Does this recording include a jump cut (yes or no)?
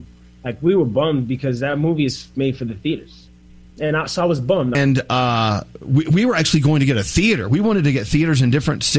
yes